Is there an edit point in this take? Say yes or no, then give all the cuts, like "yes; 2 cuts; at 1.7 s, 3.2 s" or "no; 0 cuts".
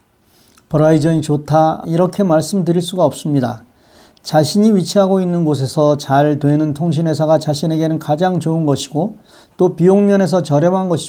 yes; 1 cut; at 1.8 s